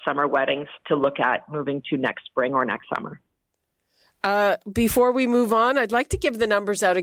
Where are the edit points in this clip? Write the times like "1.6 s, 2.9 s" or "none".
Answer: none